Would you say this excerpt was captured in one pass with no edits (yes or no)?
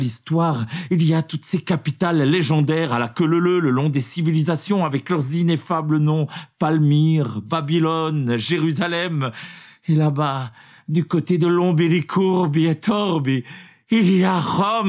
yes